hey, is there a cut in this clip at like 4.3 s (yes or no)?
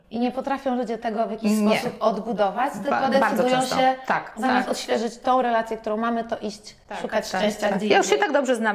yes